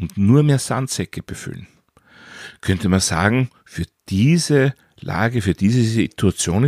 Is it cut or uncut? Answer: uncut